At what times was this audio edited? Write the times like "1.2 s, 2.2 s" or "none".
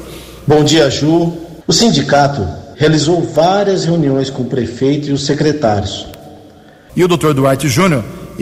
1.6 s, 2.7 s, 6.9 s